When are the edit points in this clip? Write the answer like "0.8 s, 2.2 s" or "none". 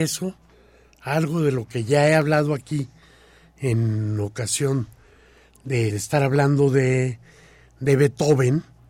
5.9 s